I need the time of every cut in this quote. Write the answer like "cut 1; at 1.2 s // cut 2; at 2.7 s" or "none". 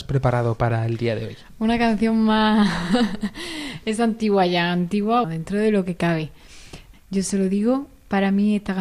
cut 1; at 5.2 s // cut 2; at 6.9 s